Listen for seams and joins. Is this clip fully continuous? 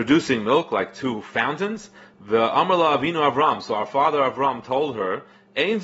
no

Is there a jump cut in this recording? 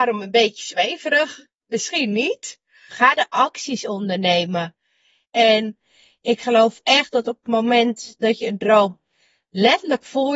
yes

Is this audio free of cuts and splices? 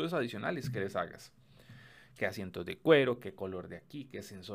yes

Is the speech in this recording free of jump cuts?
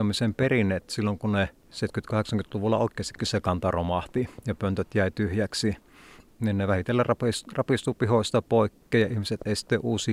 yes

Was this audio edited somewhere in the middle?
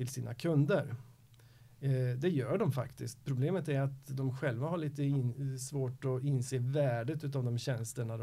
no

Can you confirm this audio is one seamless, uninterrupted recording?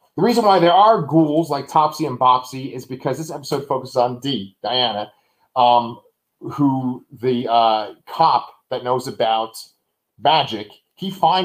yes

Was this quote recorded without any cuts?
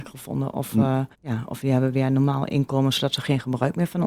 no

